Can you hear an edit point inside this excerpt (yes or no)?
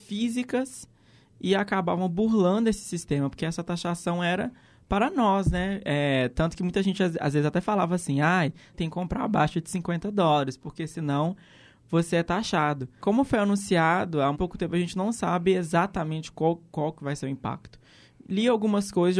yes